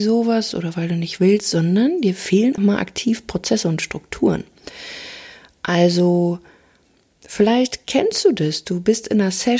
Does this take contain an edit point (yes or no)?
yes